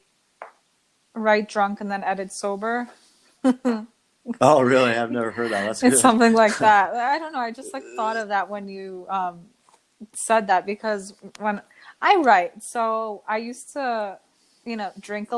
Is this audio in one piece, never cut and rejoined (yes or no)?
yes